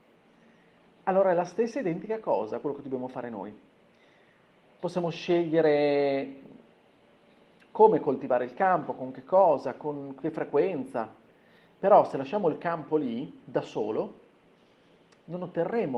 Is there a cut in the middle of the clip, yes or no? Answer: no